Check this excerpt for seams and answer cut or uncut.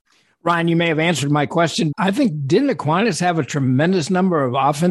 cut